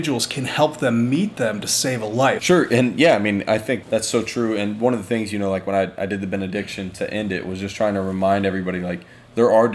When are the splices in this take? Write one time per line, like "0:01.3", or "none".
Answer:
0:02.4
0:03.8